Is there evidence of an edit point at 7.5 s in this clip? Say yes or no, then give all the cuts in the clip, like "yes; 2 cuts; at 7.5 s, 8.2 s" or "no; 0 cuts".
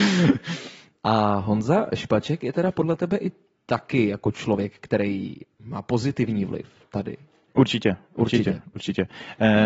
no; 0 cuts